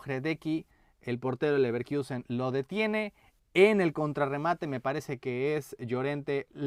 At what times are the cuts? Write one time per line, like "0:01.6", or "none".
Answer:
none